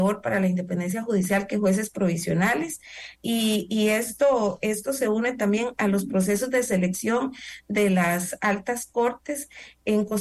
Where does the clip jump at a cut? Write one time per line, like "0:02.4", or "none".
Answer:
0:03.2